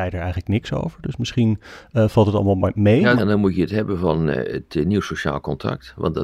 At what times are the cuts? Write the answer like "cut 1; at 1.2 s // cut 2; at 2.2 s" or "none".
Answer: cut 1; at 3.2 s // cut 2; at 4.3 s